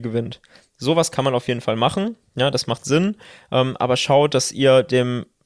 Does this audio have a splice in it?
no; 0 cuts

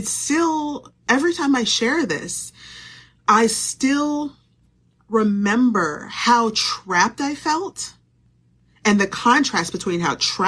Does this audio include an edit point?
no; 0 cuts

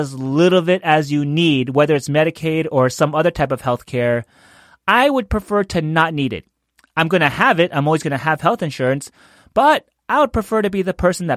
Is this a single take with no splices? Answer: yes; 0 cuts

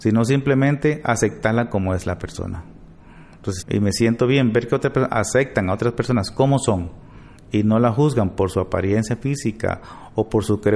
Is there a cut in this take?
yes; 1 cut; at 3.6 s

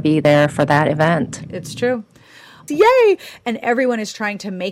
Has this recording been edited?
yes; 1 cut; at 2.7 s

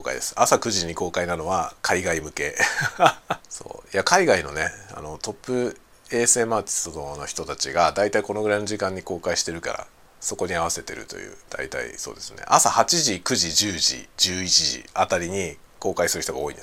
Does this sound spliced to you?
yes; 2 cuts; at 3.4 s, 14.1 s

